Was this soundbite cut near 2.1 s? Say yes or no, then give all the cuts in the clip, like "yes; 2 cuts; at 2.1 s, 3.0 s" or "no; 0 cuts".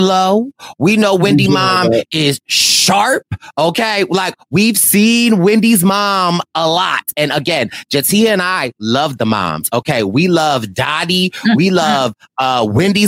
no; 0 cuts